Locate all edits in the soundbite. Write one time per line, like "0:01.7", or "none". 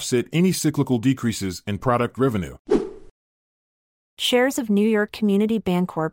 none